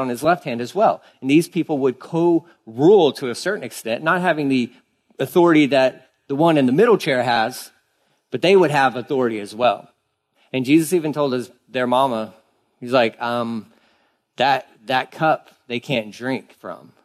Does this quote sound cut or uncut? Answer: cut